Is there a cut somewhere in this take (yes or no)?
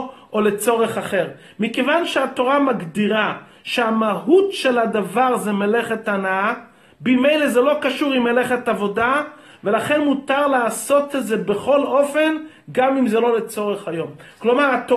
no